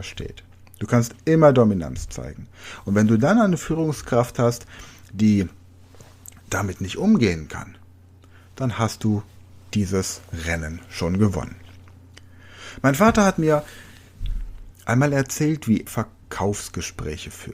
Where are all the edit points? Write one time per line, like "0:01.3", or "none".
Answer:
0:14.7
0:15.9